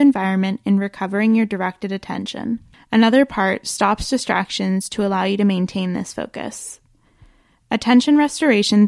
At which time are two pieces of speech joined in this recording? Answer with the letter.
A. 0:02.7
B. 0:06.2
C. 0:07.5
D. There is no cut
A